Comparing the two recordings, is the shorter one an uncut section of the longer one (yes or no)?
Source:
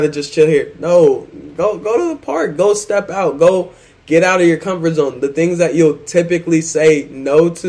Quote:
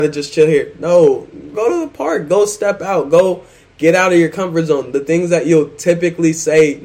no